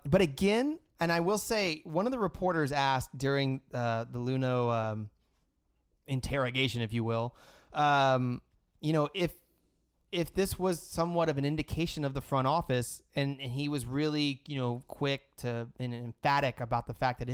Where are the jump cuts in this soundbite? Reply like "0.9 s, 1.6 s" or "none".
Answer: none

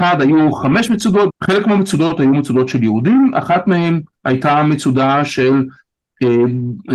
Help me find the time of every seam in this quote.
1.3 s

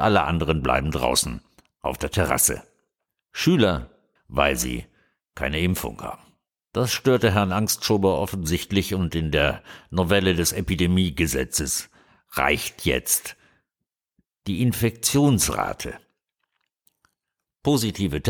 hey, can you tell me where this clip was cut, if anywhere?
4.2 s, 6.6 s

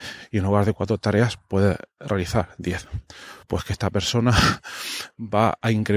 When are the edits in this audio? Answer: 3.4 s

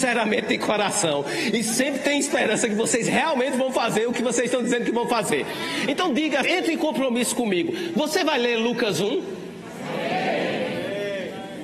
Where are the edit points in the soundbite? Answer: 6.4 s

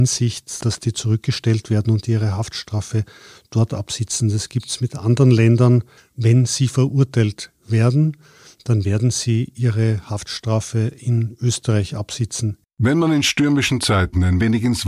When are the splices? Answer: 6.0 s, 12.6 s

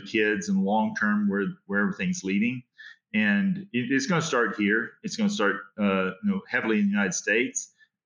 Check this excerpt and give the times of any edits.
none

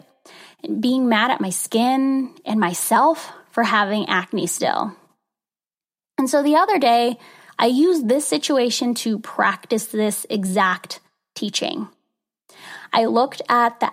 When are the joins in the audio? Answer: none

